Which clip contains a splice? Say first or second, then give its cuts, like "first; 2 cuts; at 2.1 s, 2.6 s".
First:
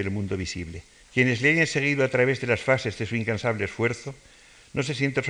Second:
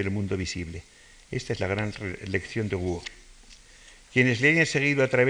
first; 1 cut; at 1.0 s